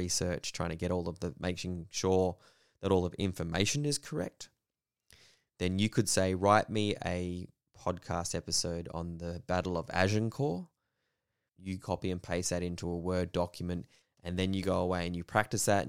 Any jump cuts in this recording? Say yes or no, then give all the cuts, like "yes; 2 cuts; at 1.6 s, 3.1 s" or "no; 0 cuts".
yes; 2 cuts; at 11.5 s, 14.0 s